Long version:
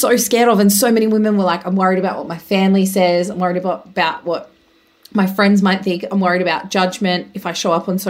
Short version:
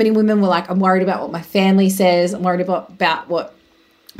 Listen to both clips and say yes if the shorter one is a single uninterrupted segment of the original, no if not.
yes